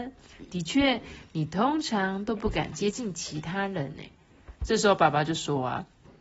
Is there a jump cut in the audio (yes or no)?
yes